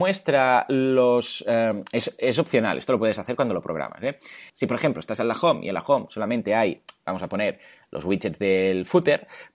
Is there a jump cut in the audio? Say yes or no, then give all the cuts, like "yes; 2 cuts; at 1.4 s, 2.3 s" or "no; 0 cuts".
yes; 1 cut; at 4.5 s